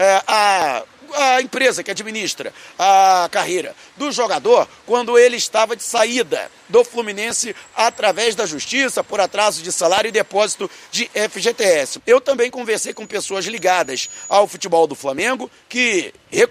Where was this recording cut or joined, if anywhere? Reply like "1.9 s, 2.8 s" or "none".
12.0 s